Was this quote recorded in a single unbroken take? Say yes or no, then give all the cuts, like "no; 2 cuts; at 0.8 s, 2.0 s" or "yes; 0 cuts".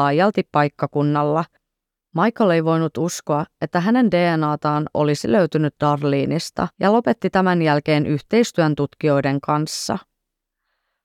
no; 1 cut; at 6.7 s